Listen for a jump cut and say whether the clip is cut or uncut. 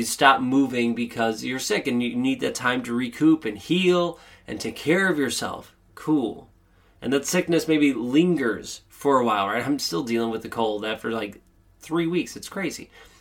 uncut